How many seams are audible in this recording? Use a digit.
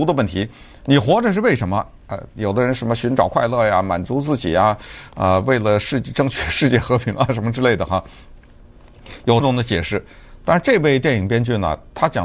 1